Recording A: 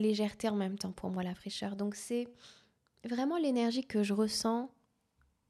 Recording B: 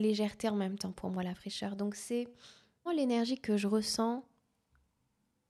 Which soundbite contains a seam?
B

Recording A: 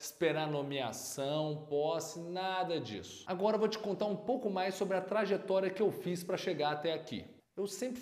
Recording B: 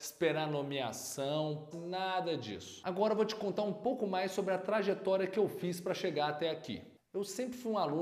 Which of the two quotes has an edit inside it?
B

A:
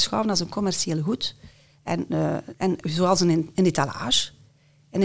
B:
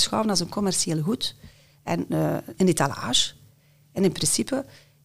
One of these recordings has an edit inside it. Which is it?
B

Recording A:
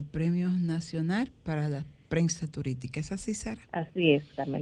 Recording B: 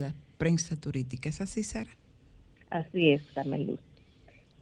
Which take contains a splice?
A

